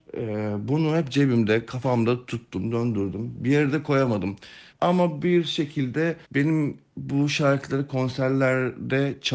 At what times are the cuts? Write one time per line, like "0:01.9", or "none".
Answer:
0:04.7
0:06.2